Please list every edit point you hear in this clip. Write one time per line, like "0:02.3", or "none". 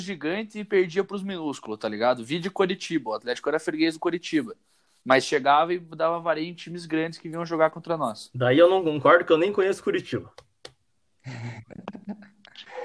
none

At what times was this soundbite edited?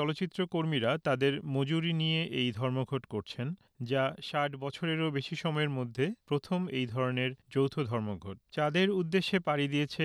0:08.5

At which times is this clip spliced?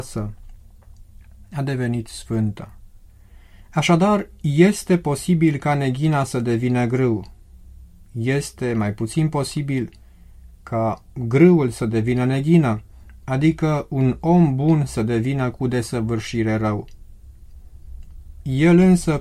none

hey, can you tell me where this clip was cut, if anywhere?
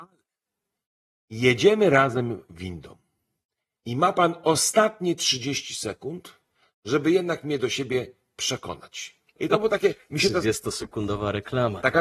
0:09.4

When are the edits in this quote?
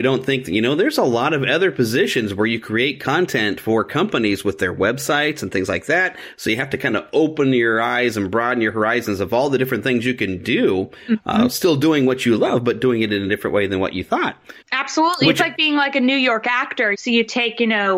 0:14.6
0:16.9

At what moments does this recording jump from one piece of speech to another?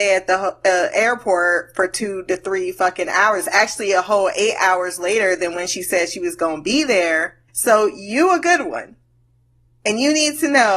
0:07.5

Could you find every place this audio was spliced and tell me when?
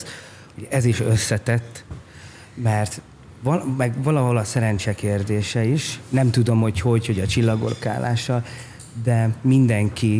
none

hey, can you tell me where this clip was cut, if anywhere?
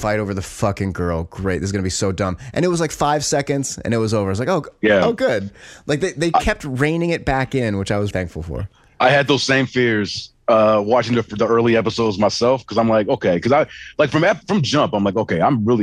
0:08.1

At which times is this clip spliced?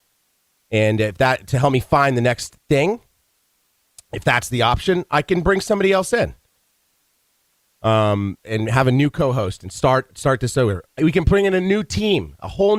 0:08.4

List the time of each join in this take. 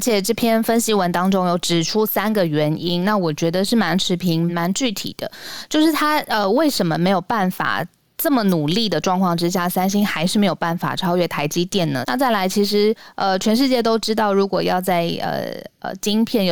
0:04.5
0:12.0

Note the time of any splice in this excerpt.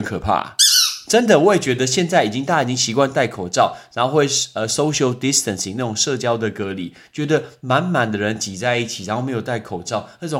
none

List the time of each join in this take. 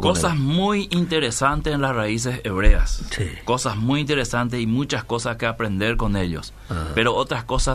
none

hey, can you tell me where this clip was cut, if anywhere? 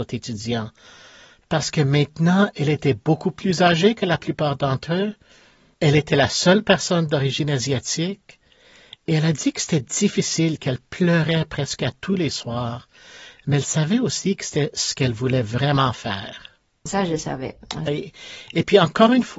0:16.9
0:17.9

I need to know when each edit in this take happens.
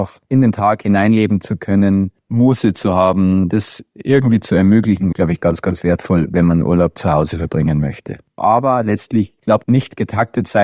0:05.1
0:08.4
0:09.6

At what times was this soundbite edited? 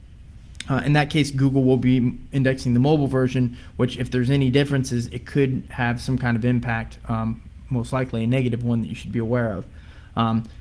none

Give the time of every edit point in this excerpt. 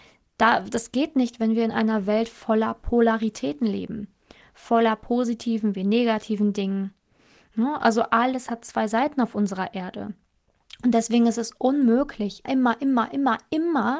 0:12.5

